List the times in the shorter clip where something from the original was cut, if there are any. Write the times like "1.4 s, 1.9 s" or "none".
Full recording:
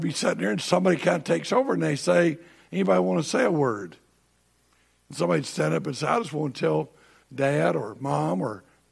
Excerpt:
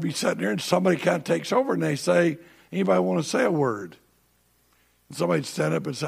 none